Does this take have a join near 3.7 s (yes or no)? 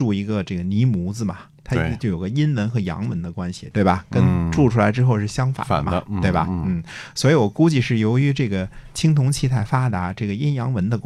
yes